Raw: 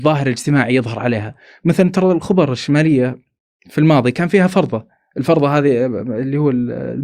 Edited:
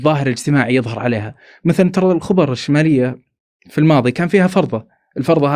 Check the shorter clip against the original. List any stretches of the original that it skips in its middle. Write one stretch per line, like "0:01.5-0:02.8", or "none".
none